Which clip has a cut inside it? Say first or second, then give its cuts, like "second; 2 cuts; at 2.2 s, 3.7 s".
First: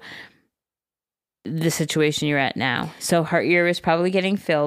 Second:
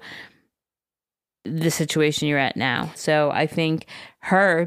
second; 1 cut; at 2.9 s